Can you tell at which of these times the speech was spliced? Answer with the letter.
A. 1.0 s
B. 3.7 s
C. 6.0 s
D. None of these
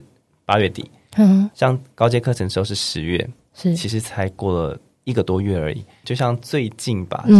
C